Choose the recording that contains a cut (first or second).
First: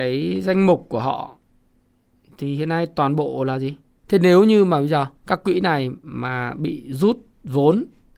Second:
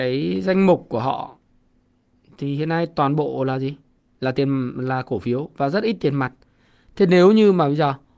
first